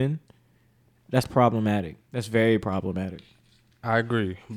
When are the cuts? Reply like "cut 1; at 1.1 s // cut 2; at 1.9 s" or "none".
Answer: cut 1; at 2.1 s